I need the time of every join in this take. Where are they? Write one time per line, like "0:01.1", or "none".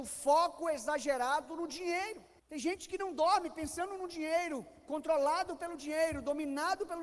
0:02.4

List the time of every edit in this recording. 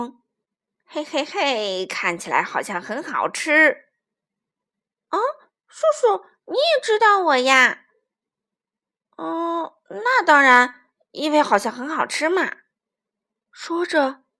none

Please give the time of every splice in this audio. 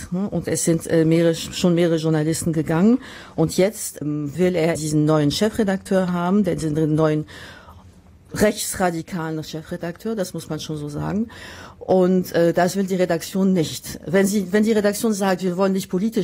0:04.8

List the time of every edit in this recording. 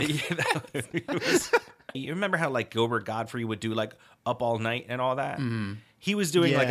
0:01.9

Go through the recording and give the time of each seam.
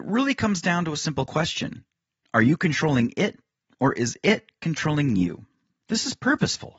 0:05.8

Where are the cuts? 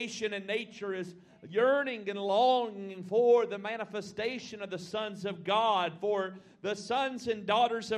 none

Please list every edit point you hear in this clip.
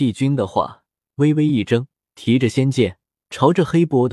0:02.0

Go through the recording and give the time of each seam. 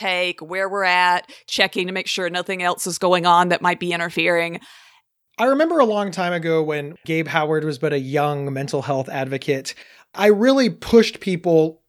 none

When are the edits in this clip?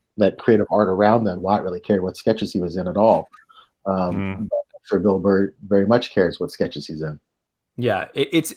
0:01.4

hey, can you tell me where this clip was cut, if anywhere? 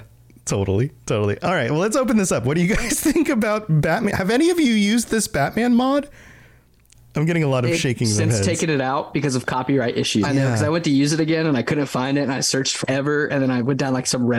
0:10.2
0:12.8

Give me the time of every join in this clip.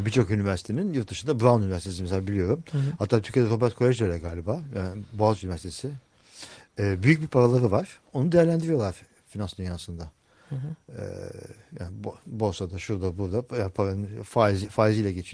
none

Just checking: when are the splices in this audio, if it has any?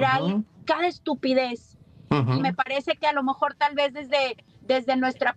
0:02.4

